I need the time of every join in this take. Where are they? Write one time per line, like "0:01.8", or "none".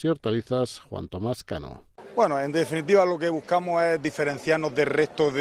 none